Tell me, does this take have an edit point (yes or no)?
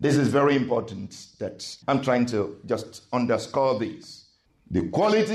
yes